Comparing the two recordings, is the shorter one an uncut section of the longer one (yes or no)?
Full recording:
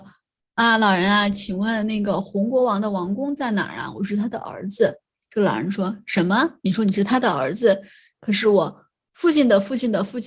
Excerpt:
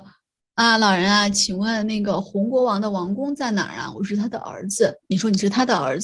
no